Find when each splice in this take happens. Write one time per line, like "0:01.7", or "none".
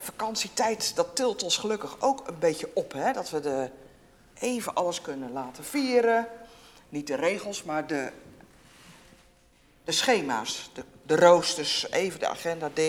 none